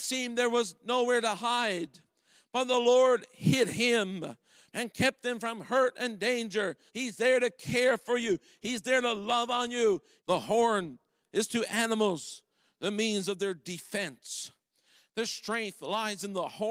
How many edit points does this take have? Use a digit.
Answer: 3